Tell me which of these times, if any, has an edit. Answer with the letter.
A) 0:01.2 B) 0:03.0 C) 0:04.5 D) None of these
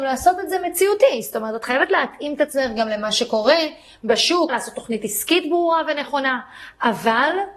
C